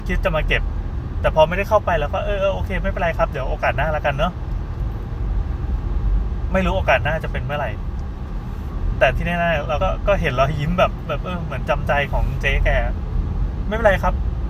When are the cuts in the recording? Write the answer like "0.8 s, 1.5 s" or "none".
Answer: 9.8 s